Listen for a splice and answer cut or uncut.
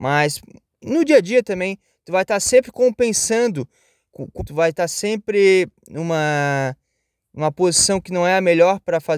cut